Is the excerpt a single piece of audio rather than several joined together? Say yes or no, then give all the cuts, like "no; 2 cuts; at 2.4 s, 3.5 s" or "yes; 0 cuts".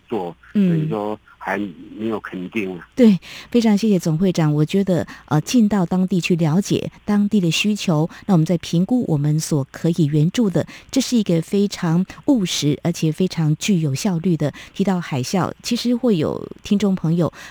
no; 1 cut; at 2.9 s